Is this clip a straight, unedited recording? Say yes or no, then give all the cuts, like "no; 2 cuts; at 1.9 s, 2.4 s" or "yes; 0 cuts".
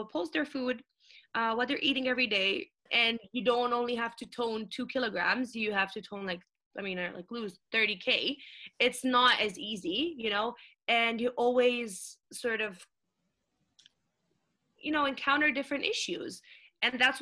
no; 1 cut; at 2.9 s